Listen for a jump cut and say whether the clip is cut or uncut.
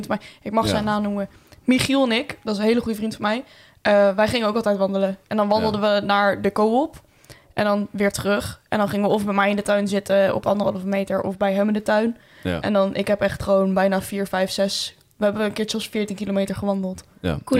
uncut